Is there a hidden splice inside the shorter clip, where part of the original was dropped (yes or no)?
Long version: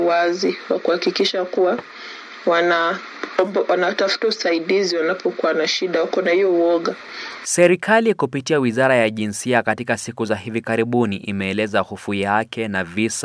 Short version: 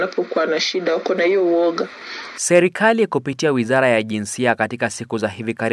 no